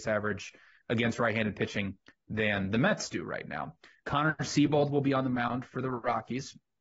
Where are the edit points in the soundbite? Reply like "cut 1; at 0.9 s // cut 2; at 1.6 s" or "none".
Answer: none